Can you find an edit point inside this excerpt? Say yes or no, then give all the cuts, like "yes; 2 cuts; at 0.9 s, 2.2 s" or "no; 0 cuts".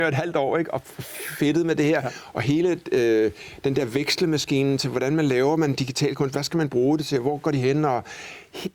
no; 0 cuts